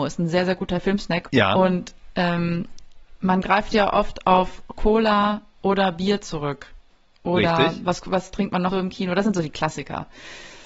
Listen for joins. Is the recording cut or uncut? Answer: cut